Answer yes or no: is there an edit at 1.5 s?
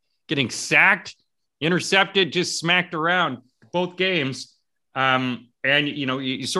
no